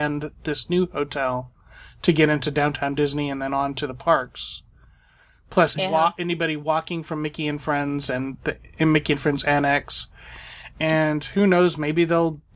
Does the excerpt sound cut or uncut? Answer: cut